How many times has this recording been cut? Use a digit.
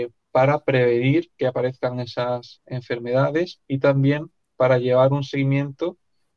0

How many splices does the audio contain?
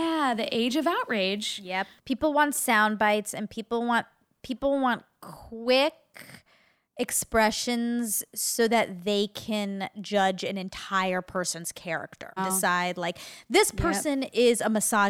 2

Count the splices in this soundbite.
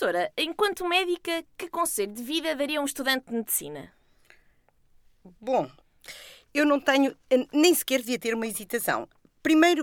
0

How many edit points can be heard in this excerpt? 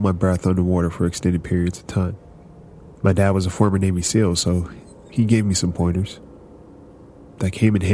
0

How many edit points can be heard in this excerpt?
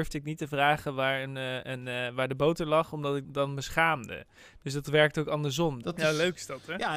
2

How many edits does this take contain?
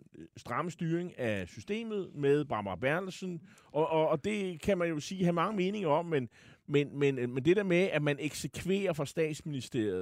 0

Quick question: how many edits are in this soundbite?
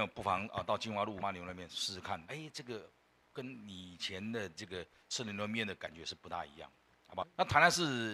3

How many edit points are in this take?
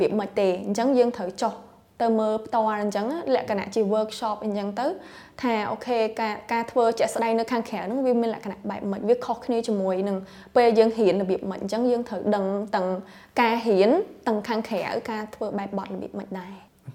0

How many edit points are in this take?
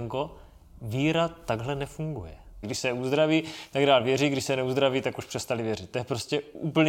1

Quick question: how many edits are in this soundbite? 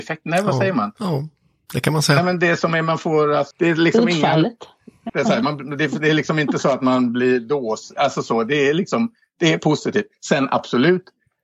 2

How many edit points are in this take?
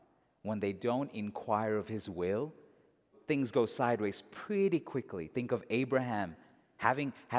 1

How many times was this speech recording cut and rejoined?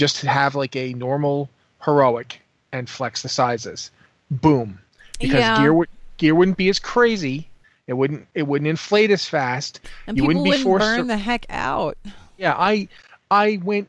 0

